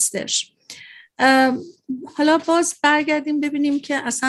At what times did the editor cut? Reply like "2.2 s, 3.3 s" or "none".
none